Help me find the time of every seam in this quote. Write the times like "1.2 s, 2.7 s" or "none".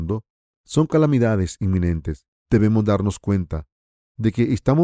2.4 s